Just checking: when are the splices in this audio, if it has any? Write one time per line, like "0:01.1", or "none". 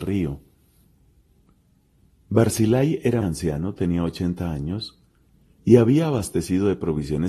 0:03.2